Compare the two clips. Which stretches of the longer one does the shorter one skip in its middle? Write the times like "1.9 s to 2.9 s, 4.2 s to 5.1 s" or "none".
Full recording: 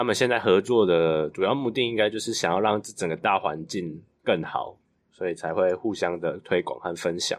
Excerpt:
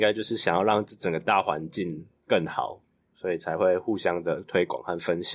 none